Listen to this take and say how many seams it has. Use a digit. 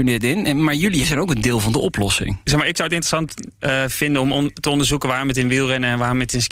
1